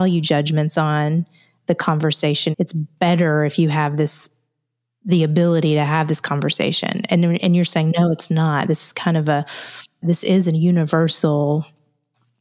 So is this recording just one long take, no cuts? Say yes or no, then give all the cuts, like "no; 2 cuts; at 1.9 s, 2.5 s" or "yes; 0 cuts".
no; 2 cuts; at 2.5 s, 10.0 s